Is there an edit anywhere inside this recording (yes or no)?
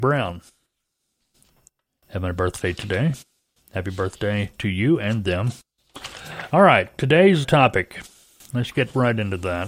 yes